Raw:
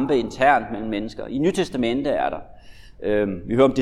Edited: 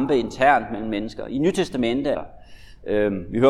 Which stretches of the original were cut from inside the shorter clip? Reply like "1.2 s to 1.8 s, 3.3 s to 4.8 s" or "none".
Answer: 2.1 s to 2.3 s